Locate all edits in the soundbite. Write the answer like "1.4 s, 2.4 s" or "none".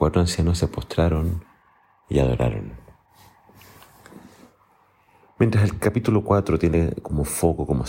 none